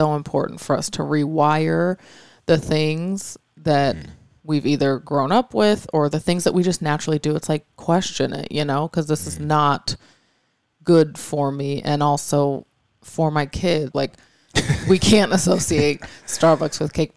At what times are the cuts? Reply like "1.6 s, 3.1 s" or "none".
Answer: 13.9 s